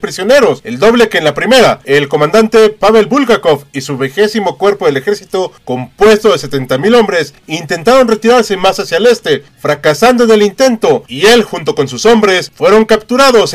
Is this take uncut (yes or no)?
yes